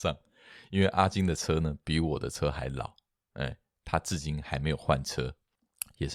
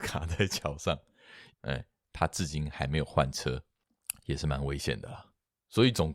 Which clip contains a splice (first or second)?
second